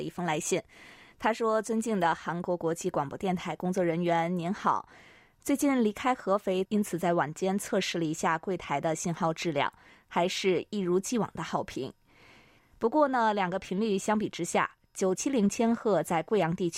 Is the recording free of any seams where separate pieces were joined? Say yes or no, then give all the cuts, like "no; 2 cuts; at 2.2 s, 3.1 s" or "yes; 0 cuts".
no; 3 cuts; at 6.6 s, 12.6 s, 15.2 s